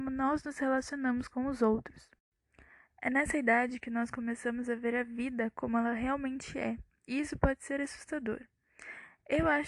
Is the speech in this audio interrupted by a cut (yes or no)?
no